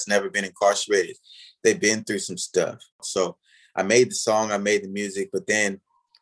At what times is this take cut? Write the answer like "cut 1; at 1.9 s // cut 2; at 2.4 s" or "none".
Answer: cut 1; at 2.9 s